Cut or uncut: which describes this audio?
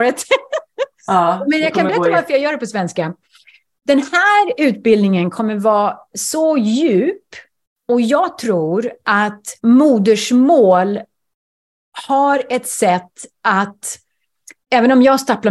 cut